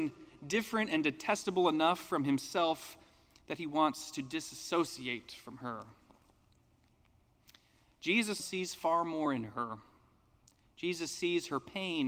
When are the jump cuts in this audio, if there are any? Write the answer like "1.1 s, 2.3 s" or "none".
8.4 s